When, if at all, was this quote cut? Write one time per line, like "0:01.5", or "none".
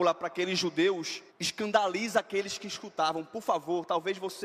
0:01.3